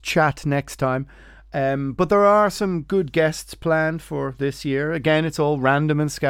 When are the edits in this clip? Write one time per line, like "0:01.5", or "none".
none